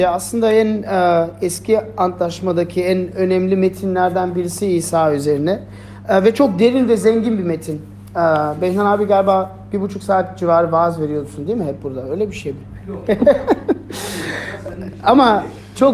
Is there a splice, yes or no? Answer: no